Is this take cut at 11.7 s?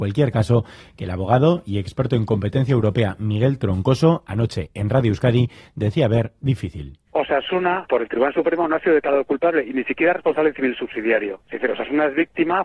no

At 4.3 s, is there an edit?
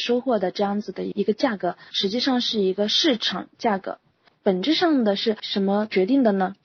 yes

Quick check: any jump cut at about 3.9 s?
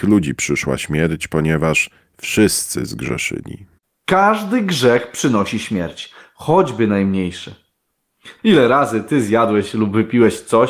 no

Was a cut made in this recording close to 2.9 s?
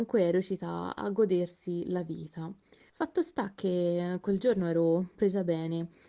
yes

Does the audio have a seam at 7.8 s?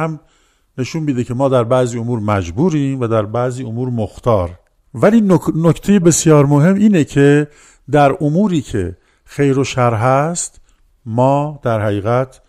no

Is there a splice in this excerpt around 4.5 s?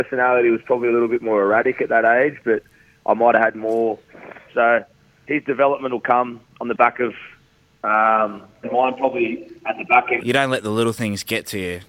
yes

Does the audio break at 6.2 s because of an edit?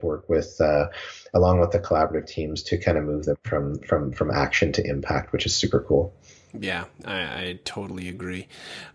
no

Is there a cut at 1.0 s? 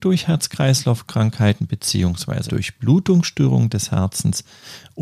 no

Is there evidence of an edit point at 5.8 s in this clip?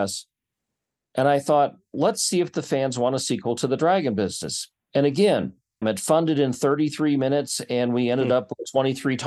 yes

